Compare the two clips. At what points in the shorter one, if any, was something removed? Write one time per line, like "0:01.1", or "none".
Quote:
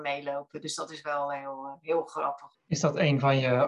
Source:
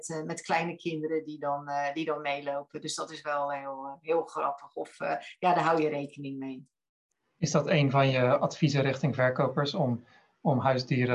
0:02.5